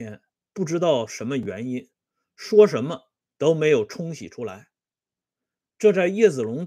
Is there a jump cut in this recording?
no; 0 cuts

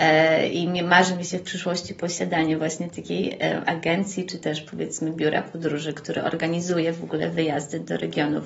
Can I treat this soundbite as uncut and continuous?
yes; 0 cuts

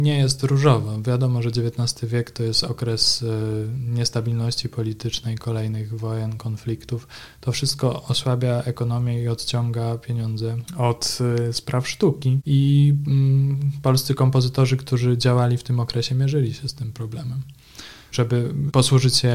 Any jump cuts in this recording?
no; 0 cuts

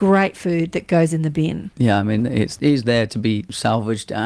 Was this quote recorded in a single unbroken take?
no; 1 cut; at 1.7 s

